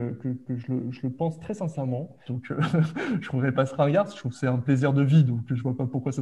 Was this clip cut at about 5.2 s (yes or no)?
no